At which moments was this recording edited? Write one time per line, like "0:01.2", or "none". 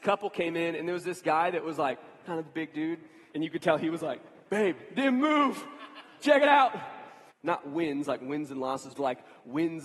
0:03.3
0:07.3
0:09.0